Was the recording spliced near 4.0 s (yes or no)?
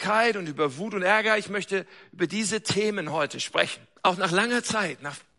yes